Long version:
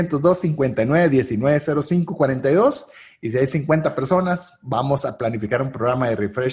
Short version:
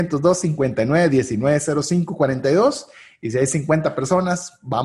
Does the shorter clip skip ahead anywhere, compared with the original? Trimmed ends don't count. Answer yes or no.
no